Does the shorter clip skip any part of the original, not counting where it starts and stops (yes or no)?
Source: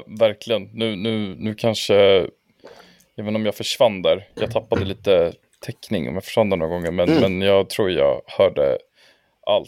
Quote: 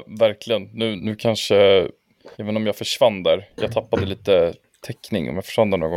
yes